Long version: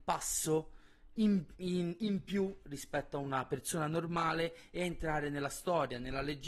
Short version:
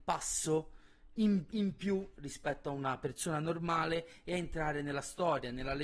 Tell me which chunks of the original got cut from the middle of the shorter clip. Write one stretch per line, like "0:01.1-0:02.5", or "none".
0:01.5-0:02.0